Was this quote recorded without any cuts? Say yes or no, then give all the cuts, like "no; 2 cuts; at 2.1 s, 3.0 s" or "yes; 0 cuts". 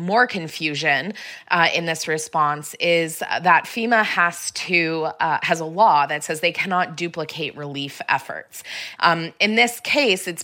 no; 1 cut; at 9.0 s